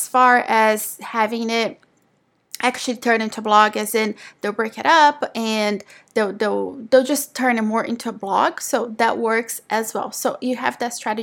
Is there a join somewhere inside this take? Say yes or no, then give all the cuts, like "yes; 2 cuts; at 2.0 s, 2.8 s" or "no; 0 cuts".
no; 0 cuts